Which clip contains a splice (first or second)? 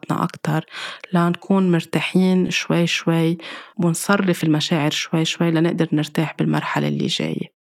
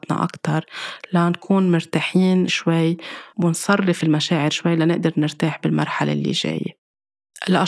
second